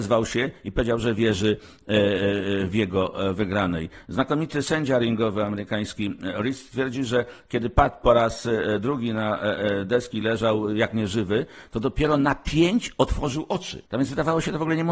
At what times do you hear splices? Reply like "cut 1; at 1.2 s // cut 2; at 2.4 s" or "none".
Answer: cut 1; at 13.9 s